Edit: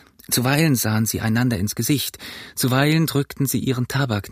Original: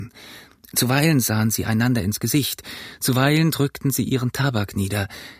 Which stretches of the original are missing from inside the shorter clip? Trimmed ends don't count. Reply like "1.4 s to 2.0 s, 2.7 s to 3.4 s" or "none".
none

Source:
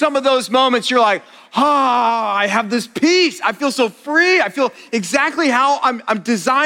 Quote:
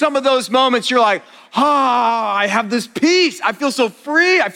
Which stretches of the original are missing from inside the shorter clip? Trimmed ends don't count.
none

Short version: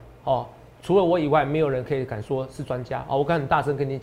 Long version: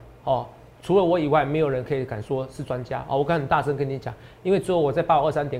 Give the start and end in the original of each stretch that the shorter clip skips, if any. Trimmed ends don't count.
none

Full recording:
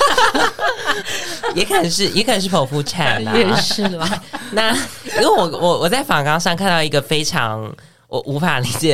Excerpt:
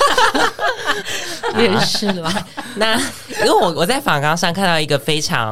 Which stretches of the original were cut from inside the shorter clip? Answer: 1.5 s to 3.3 s, 5.5 s to 5.8 s

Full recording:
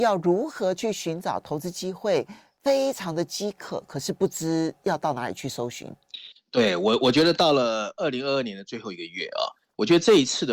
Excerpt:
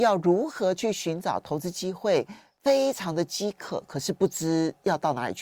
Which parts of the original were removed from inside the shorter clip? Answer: none

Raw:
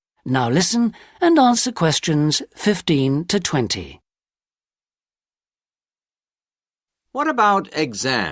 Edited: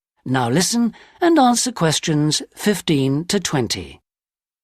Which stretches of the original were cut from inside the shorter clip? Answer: none

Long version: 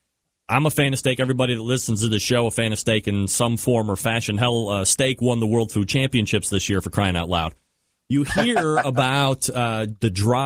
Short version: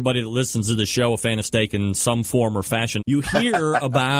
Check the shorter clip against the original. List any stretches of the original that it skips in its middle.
4.3 s to 8.0 s

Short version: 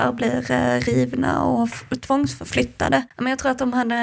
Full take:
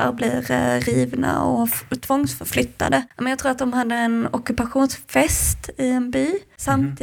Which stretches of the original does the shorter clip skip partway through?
none

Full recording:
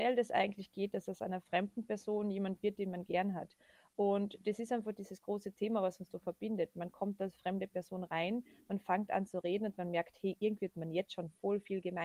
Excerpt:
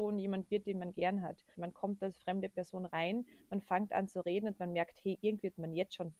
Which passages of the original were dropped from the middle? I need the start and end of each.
3.7 s to 6.7 s

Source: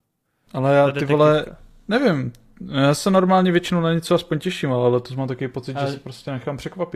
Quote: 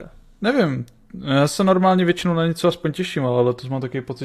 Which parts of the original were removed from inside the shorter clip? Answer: none

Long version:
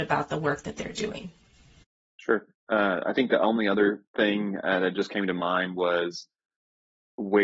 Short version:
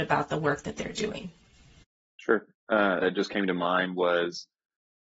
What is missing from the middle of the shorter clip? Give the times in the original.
3.0 s to 4.8 s

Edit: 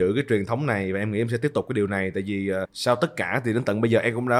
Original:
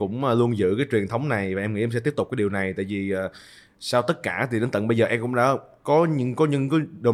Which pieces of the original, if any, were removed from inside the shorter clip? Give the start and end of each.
3.3 s to 3.7 s

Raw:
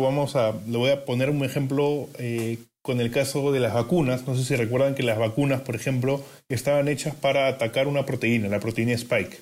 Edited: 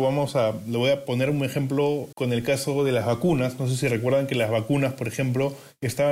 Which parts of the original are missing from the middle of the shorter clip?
2.1 s to 2.8 s

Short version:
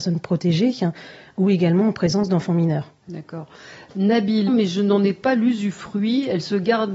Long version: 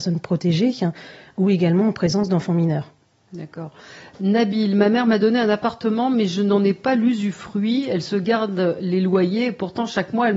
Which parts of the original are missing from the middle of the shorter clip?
3.0 s to 3.2 s, 4.7 s to 6.1 s

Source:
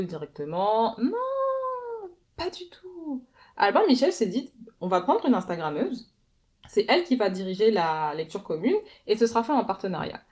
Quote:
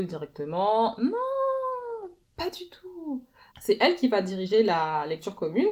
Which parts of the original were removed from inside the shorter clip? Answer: 3.5 s to 6.6 s

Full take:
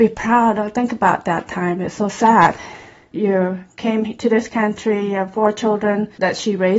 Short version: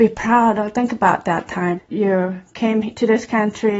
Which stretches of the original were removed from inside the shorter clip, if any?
1.8 s to 3.0 s

